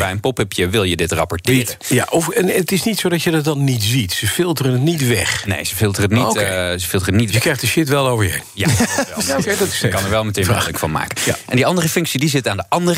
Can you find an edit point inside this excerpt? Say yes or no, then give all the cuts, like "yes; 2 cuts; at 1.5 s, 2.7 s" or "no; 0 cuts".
no; 0 cuts